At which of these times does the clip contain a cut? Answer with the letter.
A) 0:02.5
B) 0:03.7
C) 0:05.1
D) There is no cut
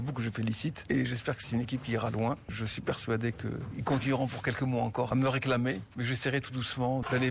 C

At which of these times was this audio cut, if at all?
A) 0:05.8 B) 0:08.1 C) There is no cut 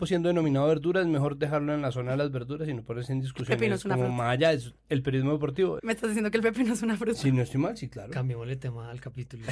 A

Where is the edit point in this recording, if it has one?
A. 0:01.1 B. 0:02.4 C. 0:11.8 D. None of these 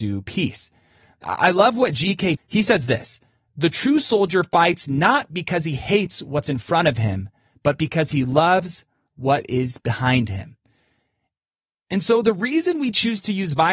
B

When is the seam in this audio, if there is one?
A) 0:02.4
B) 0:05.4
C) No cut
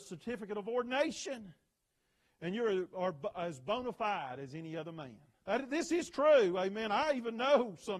B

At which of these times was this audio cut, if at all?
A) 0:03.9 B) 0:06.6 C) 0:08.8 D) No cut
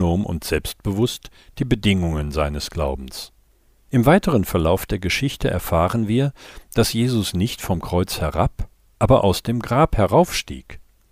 A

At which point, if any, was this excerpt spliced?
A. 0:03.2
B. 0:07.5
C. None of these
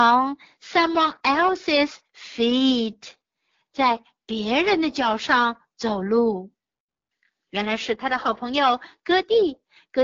B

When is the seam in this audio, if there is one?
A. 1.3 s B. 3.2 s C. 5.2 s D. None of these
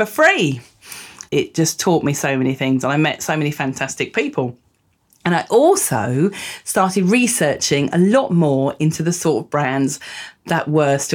A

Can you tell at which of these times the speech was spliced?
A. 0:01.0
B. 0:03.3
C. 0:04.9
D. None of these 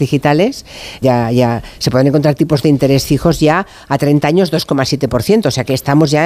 A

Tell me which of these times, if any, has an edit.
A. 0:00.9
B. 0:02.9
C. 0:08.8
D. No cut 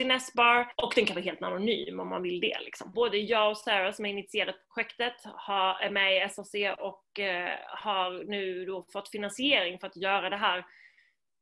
B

